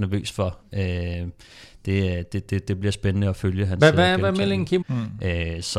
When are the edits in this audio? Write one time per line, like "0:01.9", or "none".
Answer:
0:04.8

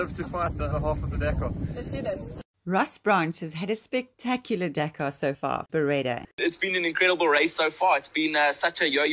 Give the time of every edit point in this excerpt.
0:05.7

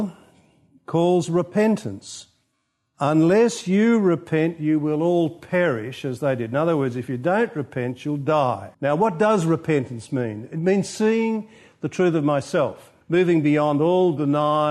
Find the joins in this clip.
0:08.7
0:13.0

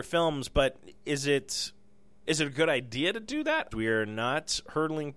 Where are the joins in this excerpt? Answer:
0:02.2
0:03.7

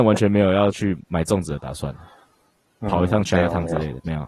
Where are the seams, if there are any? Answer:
none

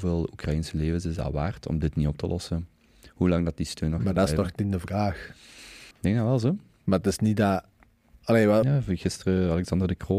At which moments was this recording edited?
0:05.9
0:08.6

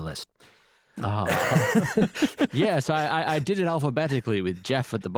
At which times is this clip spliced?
none

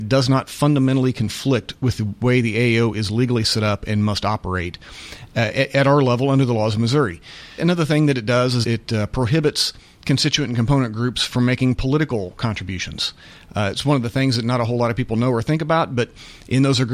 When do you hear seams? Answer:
0:07.6
0:08.6

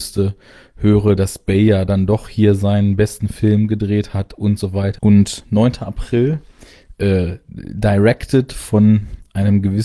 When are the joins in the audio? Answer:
0:05.0

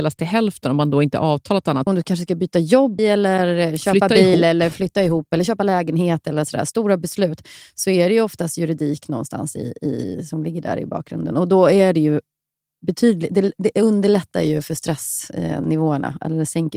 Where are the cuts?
0:01.9
0:03.0

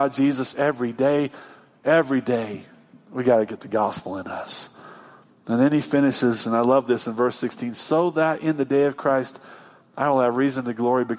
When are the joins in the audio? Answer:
none

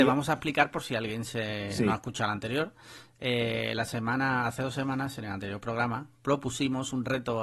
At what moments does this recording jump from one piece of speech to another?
none

